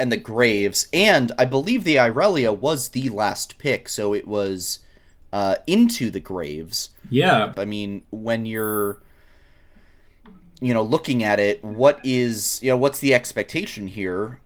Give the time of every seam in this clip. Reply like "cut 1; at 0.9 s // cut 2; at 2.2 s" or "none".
cut 1; at 7.5 s